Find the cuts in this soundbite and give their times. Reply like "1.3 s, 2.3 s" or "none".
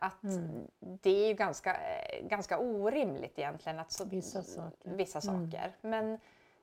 none